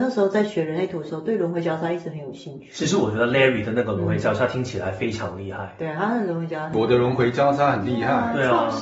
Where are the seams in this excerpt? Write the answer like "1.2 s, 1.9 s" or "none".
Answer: none

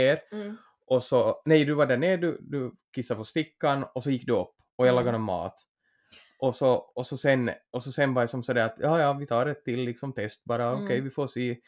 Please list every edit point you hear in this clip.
none

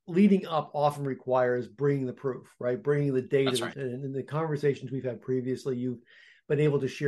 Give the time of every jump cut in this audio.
3.7 s

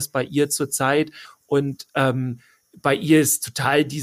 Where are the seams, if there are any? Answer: 1.2 s

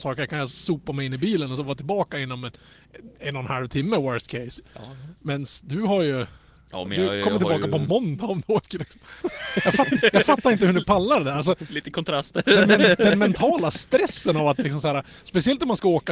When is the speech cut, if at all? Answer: 9.2 s

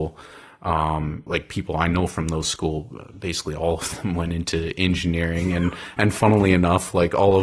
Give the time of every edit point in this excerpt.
1.3 s

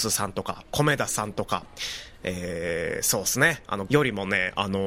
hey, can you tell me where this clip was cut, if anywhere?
3.9 s

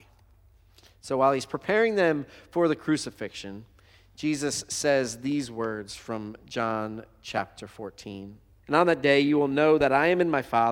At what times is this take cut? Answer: 8.6 s

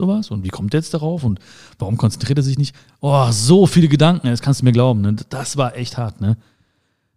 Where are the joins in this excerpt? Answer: none

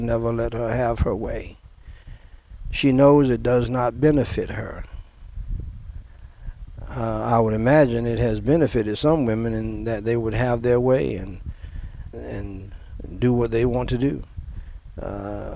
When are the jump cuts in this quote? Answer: 12.1 s

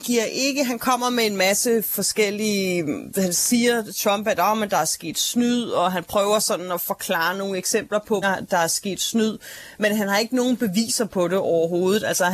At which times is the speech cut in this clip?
8.2 s

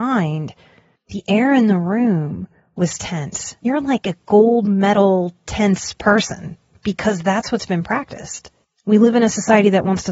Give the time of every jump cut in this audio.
3.6 s

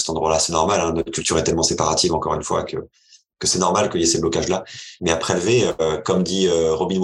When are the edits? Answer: 5.0 s

